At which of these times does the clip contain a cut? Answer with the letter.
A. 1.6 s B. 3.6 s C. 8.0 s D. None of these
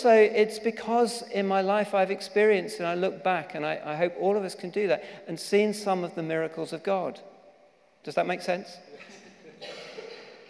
C